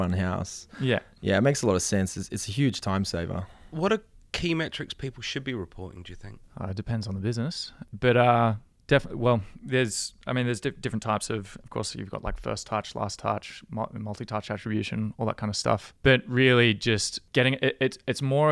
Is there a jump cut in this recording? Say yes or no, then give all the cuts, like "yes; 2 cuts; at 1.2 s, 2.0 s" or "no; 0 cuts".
no; 0 cuts